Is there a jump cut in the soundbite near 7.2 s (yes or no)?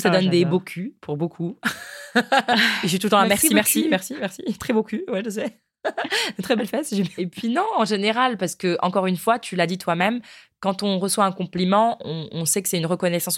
yes